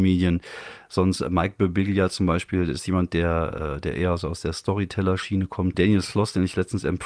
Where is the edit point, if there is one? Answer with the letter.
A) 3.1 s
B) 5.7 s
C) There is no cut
B